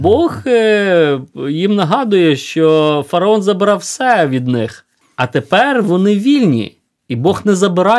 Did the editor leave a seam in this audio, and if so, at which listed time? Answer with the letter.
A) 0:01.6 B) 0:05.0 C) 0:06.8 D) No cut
D